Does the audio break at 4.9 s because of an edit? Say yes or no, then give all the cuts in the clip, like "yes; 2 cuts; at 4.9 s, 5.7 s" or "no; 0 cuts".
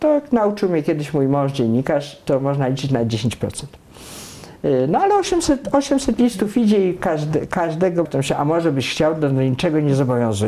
no; 1 cut; at 8.0 s